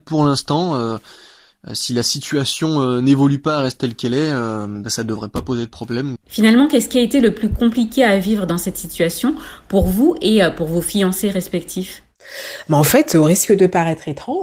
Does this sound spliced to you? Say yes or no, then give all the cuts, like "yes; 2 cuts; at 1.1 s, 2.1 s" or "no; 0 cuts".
yes; 1 cut; at 6.2 s